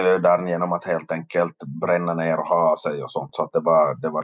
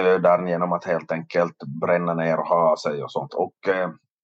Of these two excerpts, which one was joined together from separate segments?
second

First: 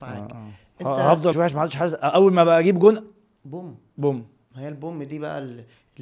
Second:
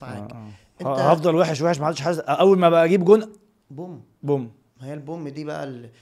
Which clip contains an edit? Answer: first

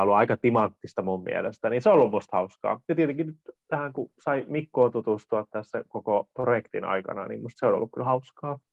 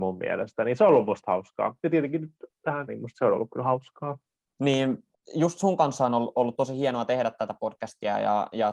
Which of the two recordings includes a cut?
second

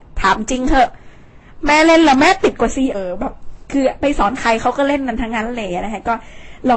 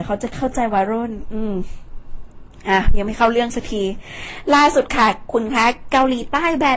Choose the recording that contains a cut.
first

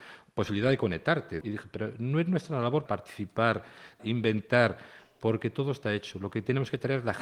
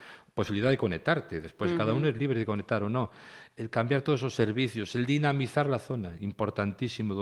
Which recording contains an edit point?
first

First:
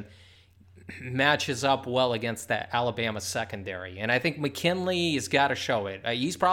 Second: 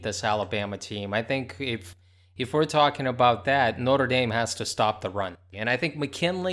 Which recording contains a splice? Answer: second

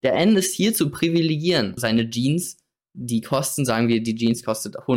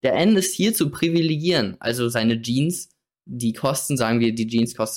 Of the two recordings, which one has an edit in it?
first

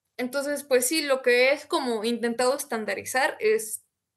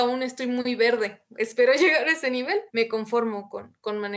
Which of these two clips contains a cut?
second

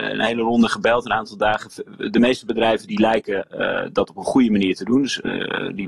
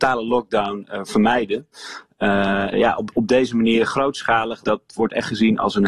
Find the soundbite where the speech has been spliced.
second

